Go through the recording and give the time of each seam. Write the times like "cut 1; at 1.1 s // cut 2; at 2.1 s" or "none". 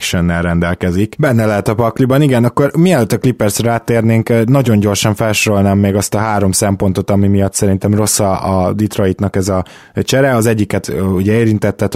cut 1; at 1.2 s